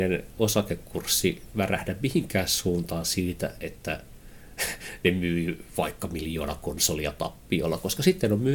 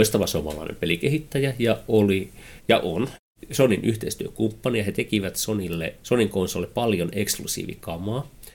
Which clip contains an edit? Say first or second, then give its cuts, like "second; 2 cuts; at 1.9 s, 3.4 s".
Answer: second; 1 cut; at 6.0 s